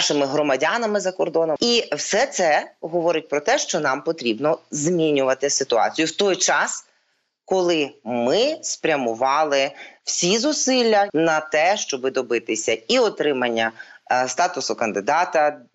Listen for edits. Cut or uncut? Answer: cut